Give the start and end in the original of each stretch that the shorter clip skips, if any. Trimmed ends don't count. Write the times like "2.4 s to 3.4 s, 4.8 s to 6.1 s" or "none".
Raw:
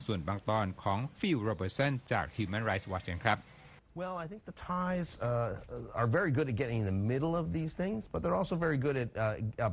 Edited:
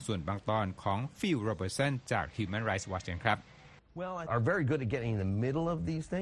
4.3 s to 5.9 s